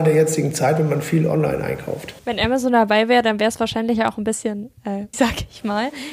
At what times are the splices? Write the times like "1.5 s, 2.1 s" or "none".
2.2 s, 5.1 s